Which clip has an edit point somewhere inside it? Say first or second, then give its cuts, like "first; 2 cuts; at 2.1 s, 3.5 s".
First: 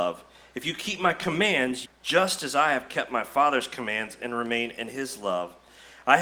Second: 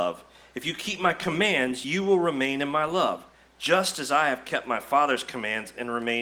first; 1 cut; at 1.8 s